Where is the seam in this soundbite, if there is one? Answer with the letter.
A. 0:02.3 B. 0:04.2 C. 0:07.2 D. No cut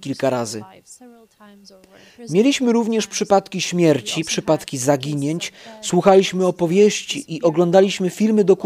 D